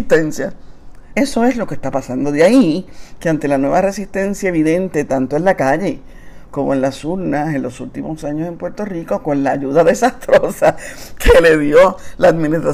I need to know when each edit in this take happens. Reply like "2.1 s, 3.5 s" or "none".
1.1 s